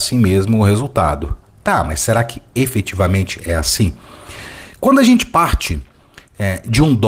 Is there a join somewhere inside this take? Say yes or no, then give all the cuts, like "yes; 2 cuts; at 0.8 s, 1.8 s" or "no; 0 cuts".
no; 0 cuts